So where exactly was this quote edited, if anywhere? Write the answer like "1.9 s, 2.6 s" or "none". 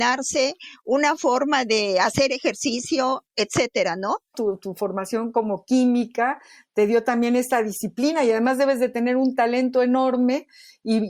4.3 s